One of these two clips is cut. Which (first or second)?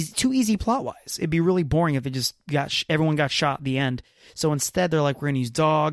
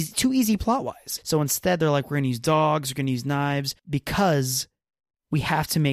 second